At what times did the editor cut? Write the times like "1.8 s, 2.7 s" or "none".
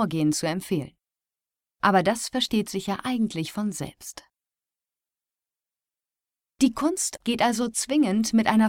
7.2 s